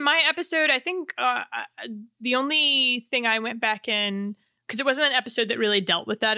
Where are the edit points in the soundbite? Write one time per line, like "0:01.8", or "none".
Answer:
none